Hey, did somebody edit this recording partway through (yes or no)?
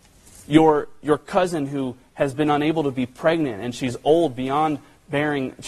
no